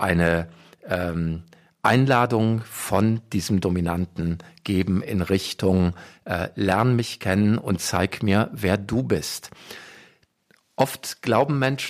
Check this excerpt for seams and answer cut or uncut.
uncut